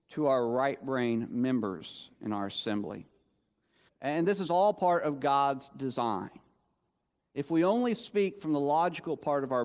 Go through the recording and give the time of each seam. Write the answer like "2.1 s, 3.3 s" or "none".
3.9 s